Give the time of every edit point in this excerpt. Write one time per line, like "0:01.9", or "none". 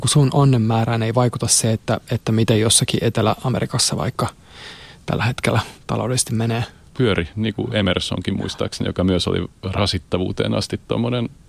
0:06.9